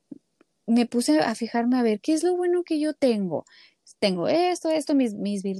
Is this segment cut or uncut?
uncut